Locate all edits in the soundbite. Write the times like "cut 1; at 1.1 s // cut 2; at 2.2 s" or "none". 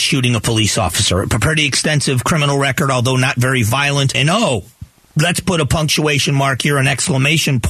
cut 1; at 4.1 s